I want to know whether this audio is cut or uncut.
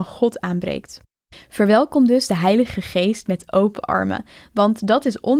uncut